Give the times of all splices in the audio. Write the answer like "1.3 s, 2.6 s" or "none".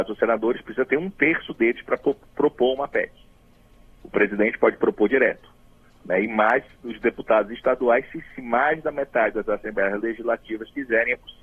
none